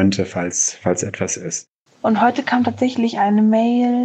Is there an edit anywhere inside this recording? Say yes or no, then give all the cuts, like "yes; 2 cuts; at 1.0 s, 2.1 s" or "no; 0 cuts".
yes; 1 cut; at 1.9 s